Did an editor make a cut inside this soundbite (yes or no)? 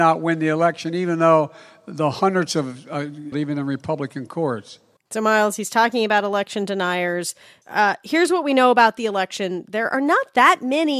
yes